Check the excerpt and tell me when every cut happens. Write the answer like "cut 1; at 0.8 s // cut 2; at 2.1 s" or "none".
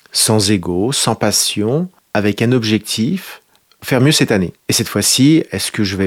cut 1; at 4.6 s